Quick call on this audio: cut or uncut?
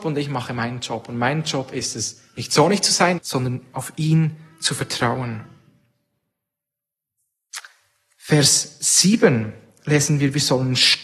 cut